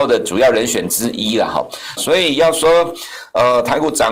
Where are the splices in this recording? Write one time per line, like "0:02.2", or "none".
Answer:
0:02.0